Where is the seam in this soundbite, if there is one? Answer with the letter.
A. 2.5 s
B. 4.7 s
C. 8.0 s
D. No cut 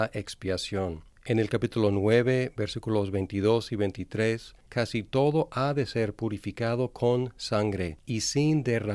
B